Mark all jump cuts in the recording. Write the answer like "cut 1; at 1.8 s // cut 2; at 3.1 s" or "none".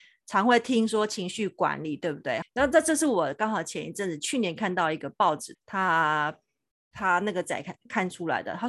cut 1; at 2.4 s // cut 2; at 5.5 s